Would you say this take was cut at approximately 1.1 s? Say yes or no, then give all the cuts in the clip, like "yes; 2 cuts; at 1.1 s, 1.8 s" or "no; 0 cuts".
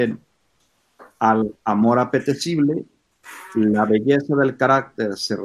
no; 0 cuts